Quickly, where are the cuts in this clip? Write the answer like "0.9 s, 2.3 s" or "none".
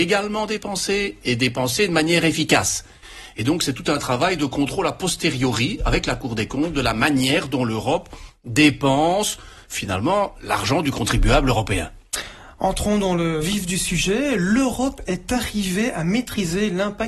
none